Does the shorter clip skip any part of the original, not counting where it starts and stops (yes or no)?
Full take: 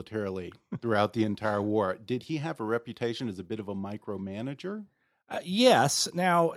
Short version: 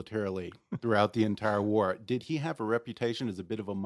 no